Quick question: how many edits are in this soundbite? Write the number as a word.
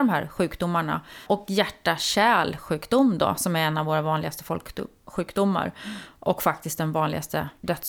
one